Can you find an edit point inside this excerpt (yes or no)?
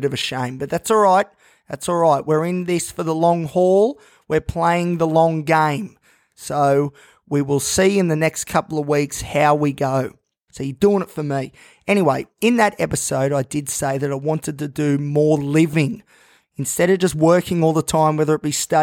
yes